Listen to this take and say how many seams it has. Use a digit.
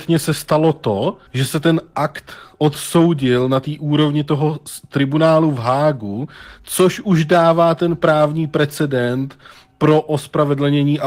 1